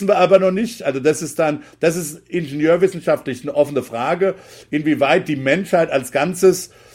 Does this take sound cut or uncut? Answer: uncut